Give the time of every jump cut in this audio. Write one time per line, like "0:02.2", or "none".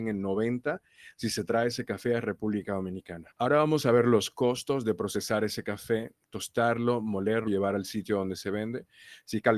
0:03.3
0:07.5